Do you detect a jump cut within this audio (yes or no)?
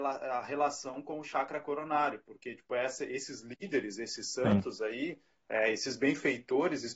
no